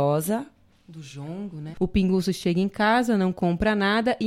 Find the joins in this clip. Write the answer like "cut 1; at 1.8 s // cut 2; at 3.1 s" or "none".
cut 1; at 1.7 s